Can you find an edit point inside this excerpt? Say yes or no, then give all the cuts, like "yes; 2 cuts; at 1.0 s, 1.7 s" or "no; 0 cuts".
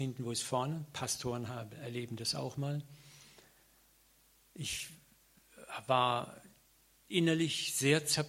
no; 0 cuts